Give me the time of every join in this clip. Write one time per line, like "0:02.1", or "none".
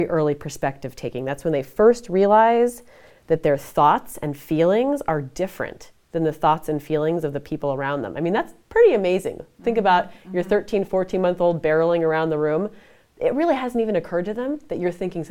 none